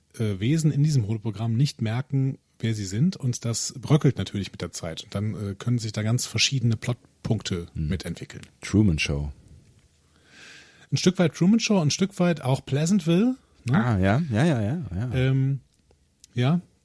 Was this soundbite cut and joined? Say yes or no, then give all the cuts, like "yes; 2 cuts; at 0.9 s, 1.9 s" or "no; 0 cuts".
no; 0 cuts